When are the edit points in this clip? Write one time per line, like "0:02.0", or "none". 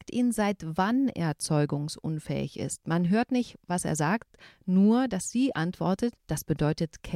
0:06.2